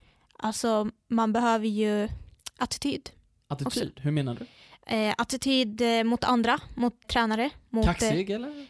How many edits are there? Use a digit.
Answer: 1